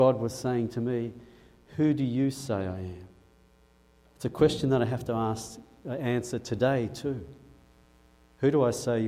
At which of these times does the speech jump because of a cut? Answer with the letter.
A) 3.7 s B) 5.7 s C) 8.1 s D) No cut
D